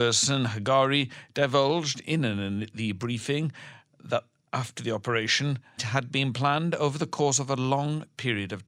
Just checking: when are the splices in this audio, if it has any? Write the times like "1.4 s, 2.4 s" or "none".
5.8 s